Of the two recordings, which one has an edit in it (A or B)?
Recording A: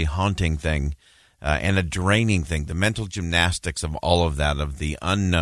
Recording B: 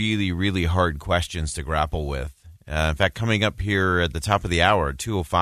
B